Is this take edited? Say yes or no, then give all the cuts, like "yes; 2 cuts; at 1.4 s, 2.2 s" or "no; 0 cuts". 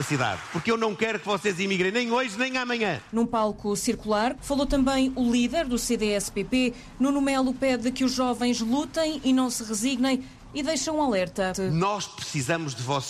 yes; 2 cuts; at 4.4 s, 11.5 s